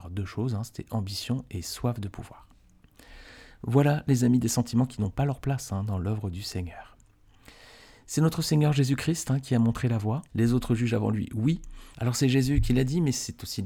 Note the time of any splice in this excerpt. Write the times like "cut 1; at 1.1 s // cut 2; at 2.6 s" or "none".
cut 1; at 10.3 s // cut 2; at 11.9 s